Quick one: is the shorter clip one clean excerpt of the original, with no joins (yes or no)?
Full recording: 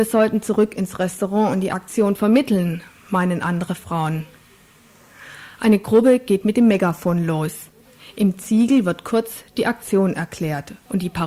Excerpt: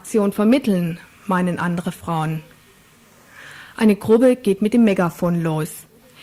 yes